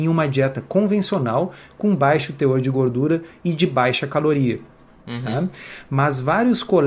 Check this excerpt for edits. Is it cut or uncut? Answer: uncut